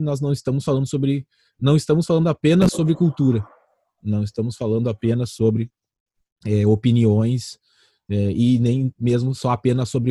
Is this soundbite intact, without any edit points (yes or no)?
yes